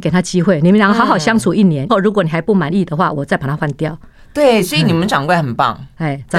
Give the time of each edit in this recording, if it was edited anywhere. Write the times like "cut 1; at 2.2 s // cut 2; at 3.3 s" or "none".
cut 1; at 1.9 s